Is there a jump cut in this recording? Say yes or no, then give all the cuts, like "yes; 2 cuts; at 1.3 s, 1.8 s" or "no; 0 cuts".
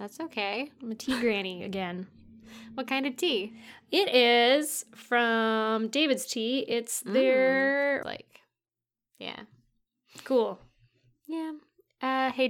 yes; 1 cut; at 8.0 s